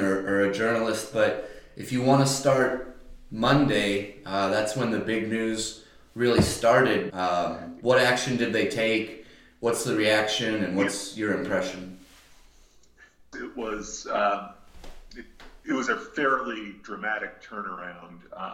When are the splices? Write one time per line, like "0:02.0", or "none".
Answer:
0:07.1
0:13.3

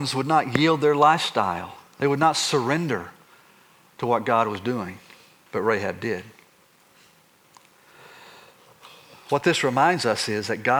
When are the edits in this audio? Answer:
none

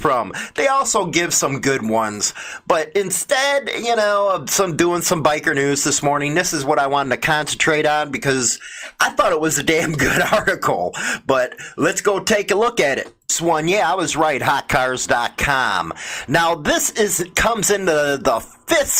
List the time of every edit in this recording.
none

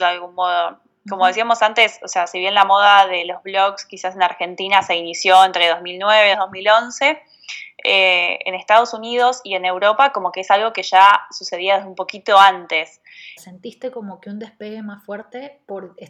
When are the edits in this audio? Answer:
0:06.3
0:13.4

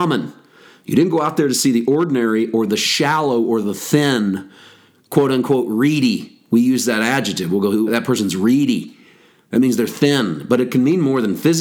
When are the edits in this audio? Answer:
0:07.9

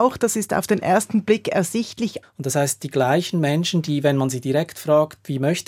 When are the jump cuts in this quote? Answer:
0:02.2

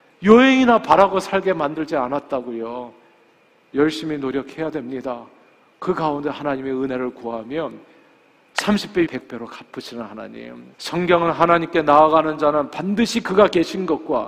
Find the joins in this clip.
0:09.1
0:10.7

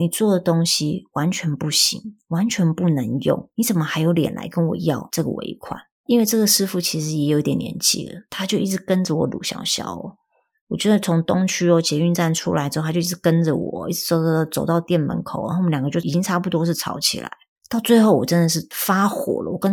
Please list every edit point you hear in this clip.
none

